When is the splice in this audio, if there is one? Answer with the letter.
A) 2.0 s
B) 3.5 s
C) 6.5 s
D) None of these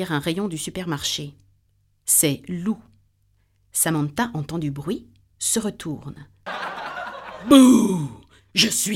C